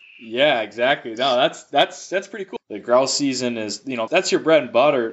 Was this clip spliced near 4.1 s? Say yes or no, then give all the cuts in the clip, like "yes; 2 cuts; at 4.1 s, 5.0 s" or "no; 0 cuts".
yes; 2 cuts; at 2.6 s, 4.1 s